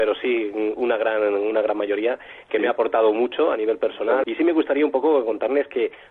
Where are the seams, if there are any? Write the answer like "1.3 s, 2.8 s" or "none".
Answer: 4.2 s

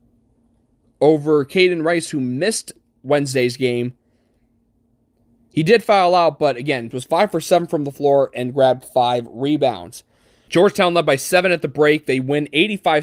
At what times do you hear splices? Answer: 6.9 s, 10.5 s

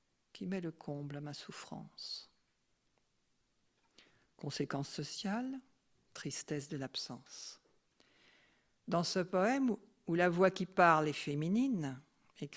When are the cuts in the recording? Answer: none

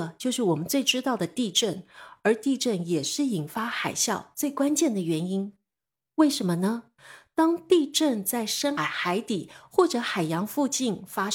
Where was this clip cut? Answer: 8.8 s

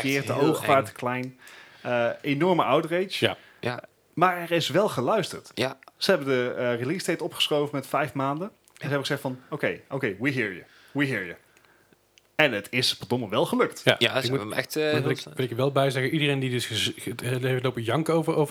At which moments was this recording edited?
none

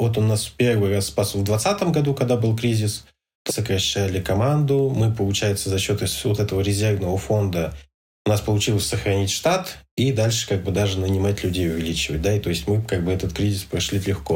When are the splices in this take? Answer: 3.5 s

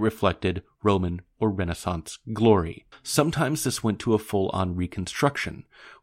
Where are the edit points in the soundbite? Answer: 2.9 s

